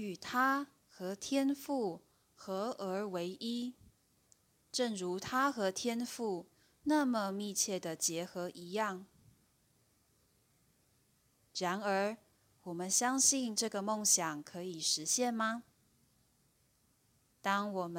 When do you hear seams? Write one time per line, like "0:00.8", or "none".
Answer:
none